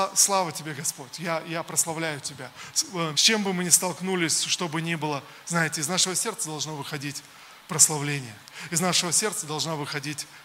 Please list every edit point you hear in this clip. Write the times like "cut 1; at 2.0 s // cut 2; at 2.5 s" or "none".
cut 1; at 3.1 s